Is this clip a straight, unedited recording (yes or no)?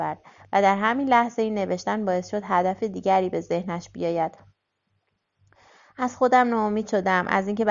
yes